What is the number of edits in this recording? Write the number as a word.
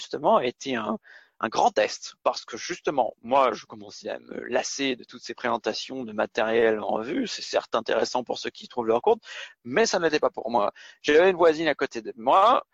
zero